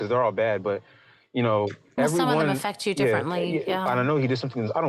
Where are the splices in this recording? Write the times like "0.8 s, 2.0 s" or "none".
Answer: 2.0 s, 3.9 s